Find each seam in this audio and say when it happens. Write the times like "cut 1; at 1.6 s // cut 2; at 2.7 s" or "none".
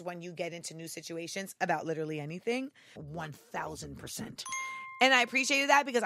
cut 1; at 3.0 s